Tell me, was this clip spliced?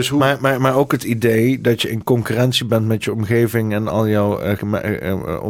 yes; 1 cut; at 4.6 s

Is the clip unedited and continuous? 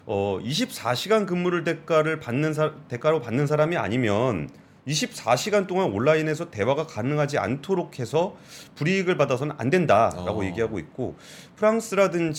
yes; 0 cuts

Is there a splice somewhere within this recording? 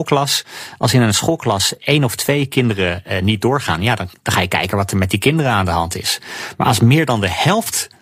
no; 0 cuts

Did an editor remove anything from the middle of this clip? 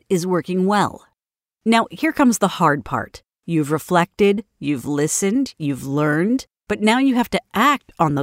no; 0 cuts

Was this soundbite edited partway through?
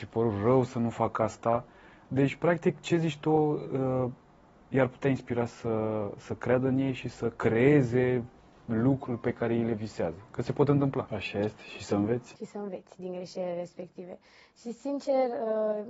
yes; 1 cut; at 11.1 s

